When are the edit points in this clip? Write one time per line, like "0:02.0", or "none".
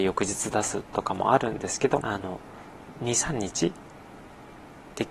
0:02.0